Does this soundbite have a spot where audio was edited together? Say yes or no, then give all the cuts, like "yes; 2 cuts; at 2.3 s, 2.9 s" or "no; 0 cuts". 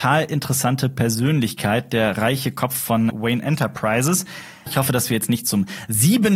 yes; 2 cuts; at 3.1 s, 4.7 s